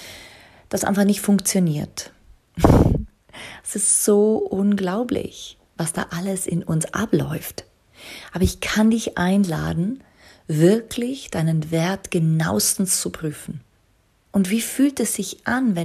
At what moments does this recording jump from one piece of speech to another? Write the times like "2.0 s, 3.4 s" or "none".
14.3 s